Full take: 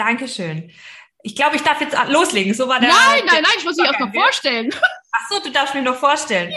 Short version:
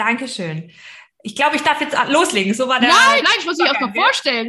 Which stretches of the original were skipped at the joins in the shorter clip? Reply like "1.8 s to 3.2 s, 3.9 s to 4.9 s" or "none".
3.2 s to 3.4 s